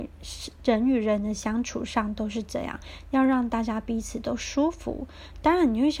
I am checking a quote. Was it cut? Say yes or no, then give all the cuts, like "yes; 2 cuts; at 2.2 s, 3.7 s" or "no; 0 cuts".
no; 0 cuts